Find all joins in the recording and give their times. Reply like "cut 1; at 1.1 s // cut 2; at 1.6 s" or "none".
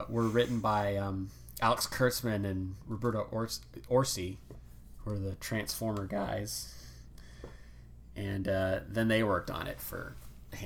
none